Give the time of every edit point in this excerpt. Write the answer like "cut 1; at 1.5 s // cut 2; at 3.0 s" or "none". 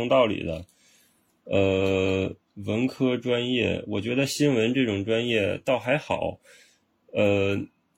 none